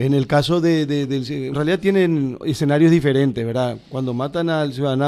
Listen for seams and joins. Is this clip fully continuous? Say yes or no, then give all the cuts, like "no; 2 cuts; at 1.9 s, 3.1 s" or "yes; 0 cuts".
no; 1 cut; at 1.5 s